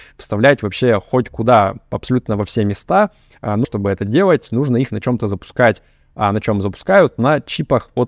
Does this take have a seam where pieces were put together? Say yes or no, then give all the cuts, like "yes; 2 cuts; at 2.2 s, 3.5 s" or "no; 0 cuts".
yes; 1 cut; at 3.6 s